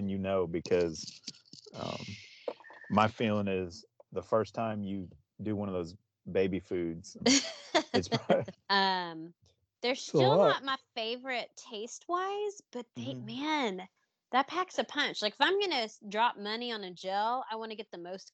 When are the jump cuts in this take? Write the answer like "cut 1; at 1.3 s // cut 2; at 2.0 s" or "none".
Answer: cut 1; at 7.2 s // cut 2; at 8.5 s